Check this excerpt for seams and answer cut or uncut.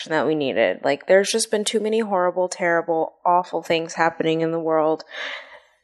uncut